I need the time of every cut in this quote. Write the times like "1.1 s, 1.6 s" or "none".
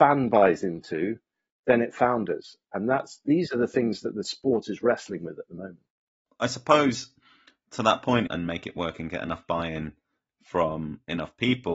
8.3 s